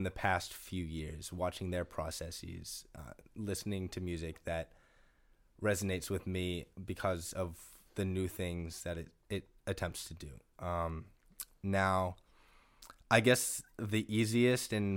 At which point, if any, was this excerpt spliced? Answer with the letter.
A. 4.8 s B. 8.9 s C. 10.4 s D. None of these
D